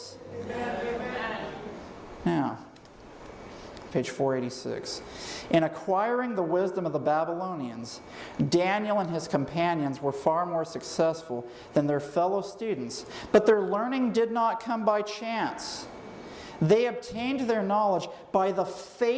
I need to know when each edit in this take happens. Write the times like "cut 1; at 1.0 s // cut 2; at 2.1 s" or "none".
cut 1; at 3.9 s